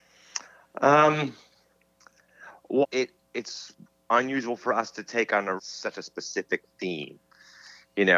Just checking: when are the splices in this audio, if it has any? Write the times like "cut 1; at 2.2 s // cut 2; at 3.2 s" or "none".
cut 1; at 2.8 s // cut 2; at 5.6 s